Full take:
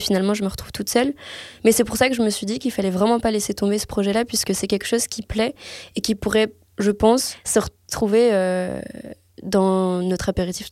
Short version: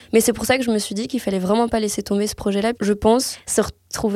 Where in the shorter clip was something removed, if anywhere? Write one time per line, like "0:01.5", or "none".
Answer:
0:02.7